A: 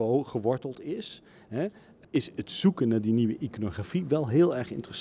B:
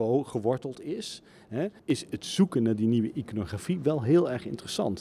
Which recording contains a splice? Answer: B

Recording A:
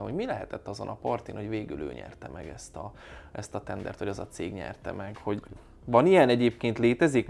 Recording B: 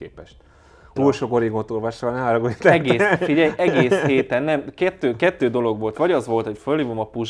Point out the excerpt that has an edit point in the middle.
B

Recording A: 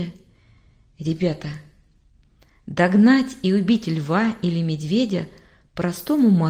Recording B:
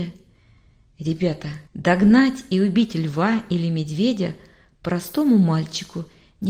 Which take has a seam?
B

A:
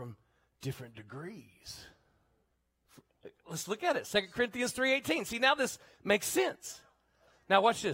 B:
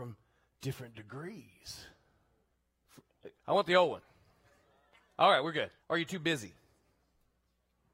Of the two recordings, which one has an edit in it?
B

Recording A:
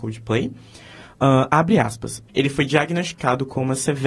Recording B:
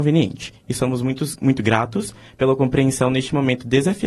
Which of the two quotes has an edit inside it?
A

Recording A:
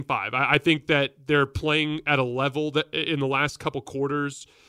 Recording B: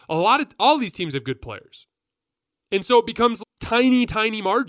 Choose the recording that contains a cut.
B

